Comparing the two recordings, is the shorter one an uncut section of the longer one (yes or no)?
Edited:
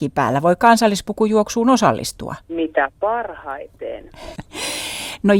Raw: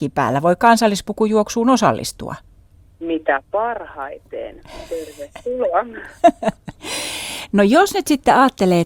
no